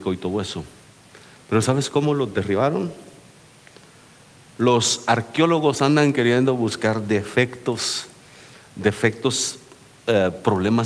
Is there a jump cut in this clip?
no; 0 cuts

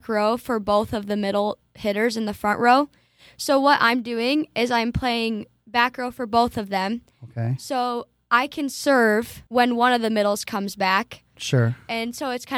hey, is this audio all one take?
no; 2 cuts; at 9.5 s, 11.3 s

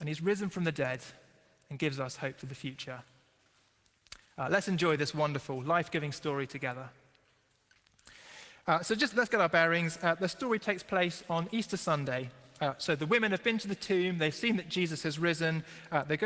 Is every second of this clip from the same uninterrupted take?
yes; 0 cuts

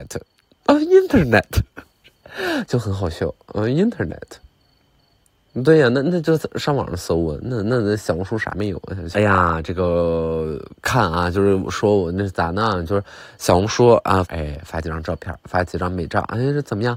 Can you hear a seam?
yes; 2 cuts; at 9.1 s, 14.2 s

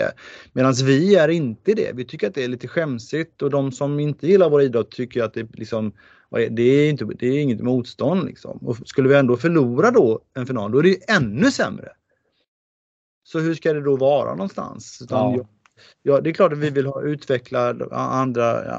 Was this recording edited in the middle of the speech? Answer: no; 0 cuts

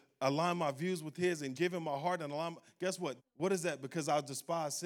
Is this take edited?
yes; 2 cuts; at 1.5 s, 3.2 s

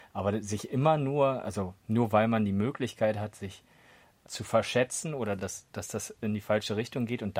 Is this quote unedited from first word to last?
yes; 0 cuts

